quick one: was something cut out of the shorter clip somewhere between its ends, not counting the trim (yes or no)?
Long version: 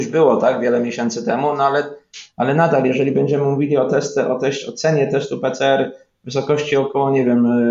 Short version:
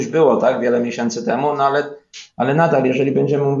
no